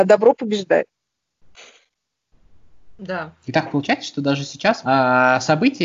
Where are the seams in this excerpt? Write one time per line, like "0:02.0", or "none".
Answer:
0:03.4
0:04.8